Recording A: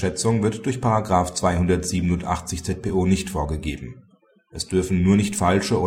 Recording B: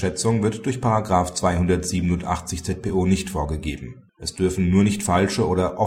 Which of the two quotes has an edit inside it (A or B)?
B